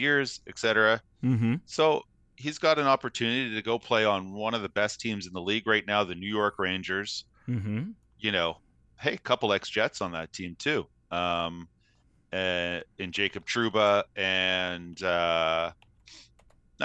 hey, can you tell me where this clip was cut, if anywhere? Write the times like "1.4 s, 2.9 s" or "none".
none